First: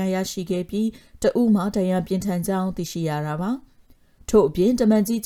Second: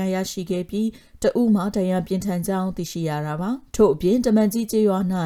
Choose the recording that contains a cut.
second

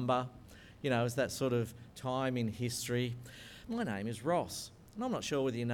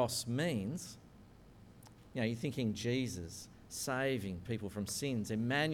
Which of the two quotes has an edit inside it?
first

